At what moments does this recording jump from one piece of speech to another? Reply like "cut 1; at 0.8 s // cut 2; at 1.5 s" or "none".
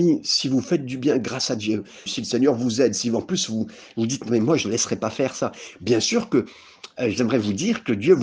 cut 1; at 2.1 s